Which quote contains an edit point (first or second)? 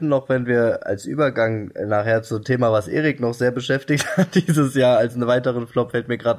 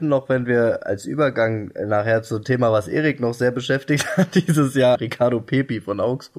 second